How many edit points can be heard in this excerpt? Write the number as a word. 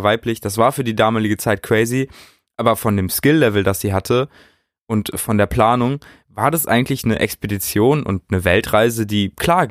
zero